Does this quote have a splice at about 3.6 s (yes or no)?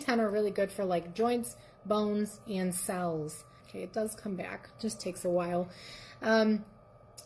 yes